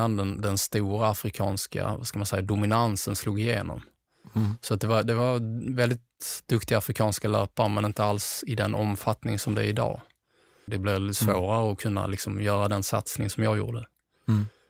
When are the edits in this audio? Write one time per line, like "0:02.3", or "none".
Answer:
0:10.7